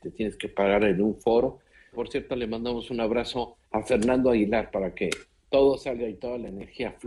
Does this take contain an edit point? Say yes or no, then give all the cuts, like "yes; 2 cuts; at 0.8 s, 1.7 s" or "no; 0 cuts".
yes; 2 cuts; at 1.9 s, 3.6 s